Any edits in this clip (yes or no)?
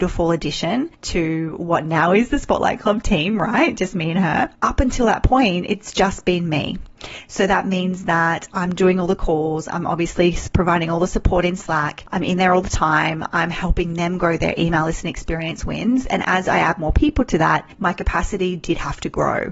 no